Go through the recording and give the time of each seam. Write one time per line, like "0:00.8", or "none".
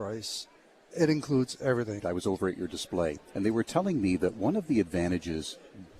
0:00.9
0:02.0